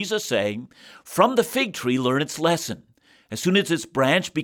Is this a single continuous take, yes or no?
yes